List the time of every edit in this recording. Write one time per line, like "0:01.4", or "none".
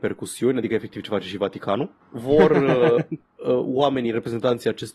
none